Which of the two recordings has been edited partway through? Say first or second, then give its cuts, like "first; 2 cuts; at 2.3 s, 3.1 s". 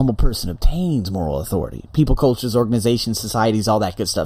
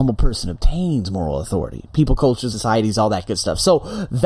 second; 1 cut; at 2.5 s